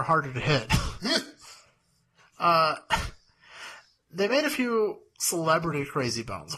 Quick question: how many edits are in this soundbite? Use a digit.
0